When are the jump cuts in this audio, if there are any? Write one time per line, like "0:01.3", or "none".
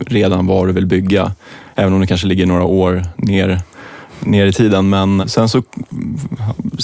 0:05.2